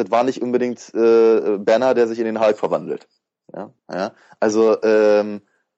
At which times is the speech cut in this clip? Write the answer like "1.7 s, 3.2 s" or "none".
3.8 s